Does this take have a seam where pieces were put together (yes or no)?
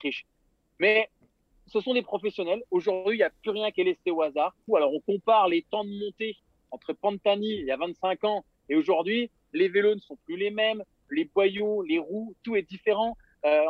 yes